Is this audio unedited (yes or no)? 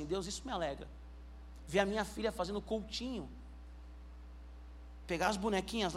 yes